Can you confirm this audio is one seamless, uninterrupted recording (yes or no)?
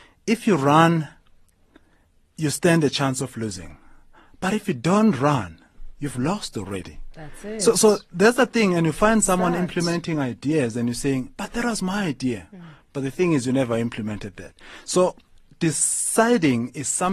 yes